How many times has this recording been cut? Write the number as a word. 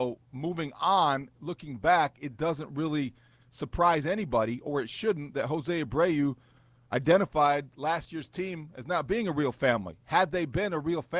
zero